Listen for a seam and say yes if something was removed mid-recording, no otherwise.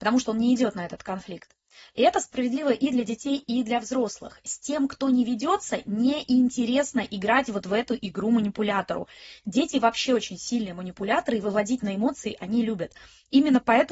no